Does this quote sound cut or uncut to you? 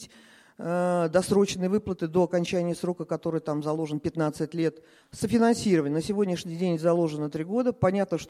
cut